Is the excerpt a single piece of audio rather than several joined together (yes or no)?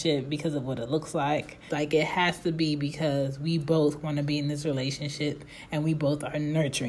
no